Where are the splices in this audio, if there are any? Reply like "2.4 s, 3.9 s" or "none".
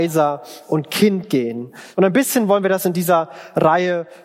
1.9 s